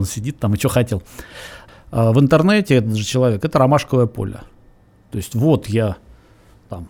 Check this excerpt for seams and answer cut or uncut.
cut